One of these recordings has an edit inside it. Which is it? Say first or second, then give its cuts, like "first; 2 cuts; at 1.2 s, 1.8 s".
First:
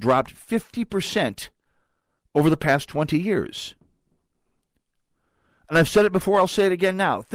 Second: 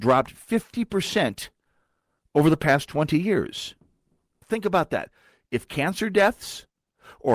second; 1 cut; at 4.4 s